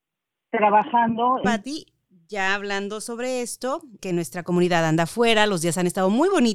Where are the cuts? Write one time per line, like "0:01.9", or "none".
0:01.4
0:04.0